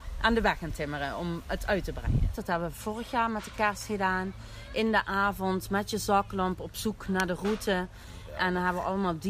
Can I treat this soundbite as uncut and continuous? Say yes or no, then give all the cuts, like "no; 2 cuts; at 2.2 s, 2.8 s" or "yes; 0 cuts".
no; 1 cut; at 2.3 s